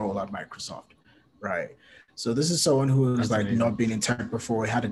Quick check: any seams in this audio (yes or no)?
no